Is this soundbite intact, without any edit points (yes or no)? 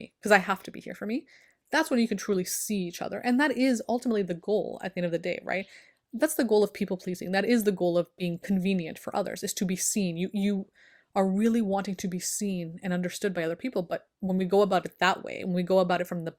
yes